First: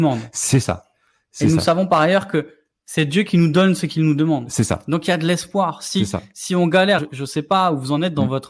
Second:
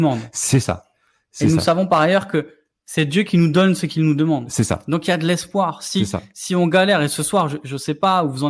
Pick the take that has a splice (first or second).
first